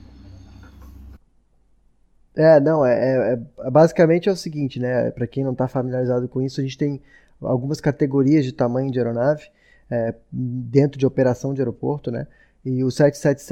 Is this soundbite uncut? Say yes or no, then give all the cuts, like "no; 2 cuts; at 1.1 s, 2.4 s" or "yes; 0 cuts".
yes; 0 cuts